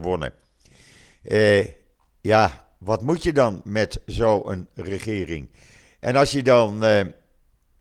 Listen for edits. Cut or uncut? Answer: cut